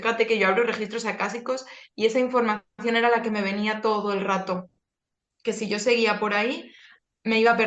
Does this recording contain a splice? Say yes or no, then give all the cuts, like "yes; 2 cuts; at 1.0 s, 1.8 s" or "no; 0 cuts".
no; 0 cuts